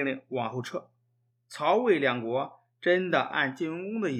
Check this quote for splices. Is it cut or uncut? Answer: cut